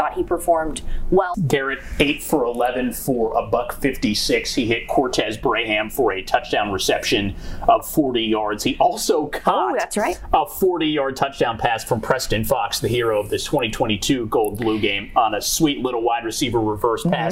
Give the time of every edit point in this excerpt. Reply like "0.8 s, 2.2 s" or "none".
1.3 s

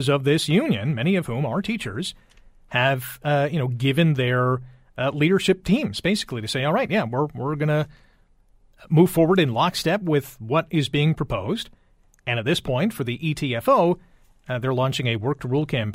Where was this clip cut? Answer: none

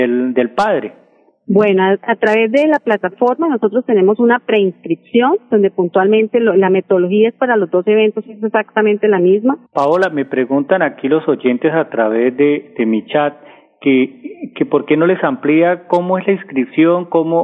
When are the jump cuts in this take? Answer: 9.7 s

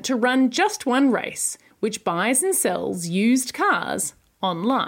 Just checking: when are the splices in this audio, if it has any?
1.7 s

